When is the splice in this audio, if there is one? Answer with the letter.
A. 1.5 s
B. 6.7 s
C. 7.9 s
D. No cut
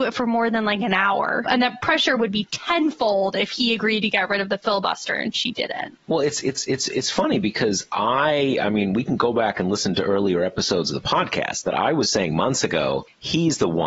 A